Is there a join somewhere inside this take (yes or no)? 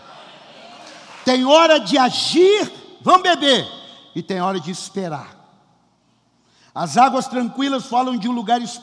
yes